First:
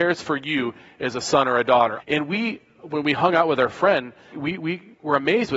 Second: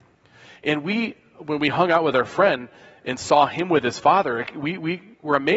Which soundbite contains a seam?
first; 2 cuts; at 2.0 s, 4.3 s

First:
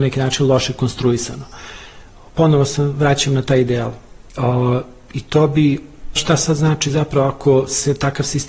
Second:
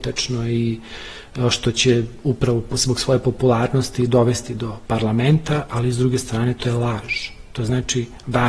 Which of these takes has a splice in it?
first; 2 cuts; at 4.3 s, 6.2 s

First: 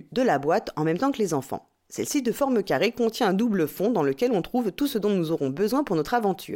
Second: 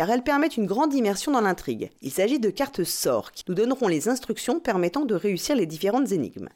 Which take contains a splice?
second; 2 cuts; at 2.0 s, 3.4 s

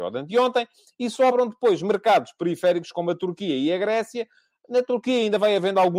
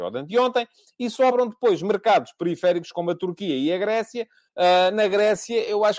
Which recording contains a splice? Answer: second; 1 cut; at 4.5 s

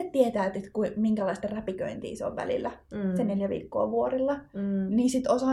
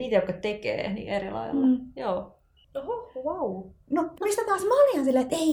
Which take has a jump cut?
second; 2 cuts; at 2.6 s, 4.2 s

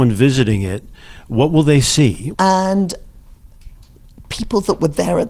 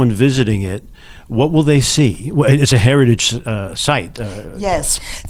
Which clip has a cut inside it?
first; 1 cut; at 2.3 s

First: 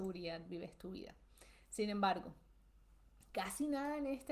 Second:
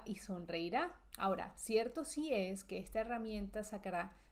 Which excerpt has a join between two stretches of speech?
second; 1 cut; at 1.1 s

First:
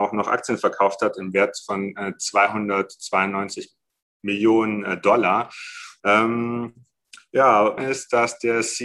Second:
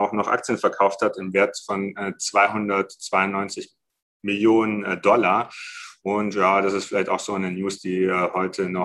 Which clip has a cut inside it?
first; 2 cuts; at 6.0 s, 7.8 s

